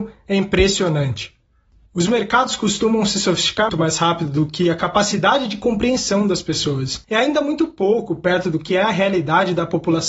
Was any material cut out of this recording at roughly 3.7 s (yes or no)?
yes